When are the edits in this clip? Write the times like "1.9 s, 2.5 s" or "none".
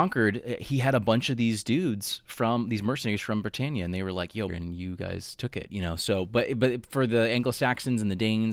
4.5 s